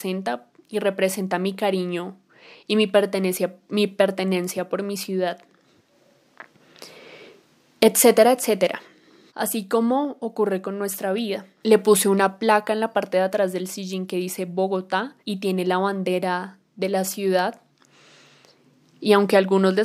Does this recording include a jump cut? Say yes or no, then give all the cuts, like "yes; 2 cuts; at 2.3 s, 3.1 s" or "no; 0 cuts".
yes; 3 cuts; at 9.3 s, 11.6 s, 15.2 s